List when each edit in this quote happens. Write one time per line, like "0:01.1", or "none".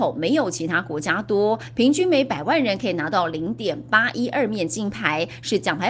0:01.7